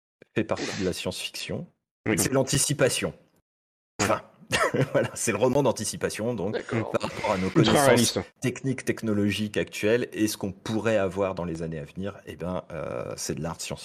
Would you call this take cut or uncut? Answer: cut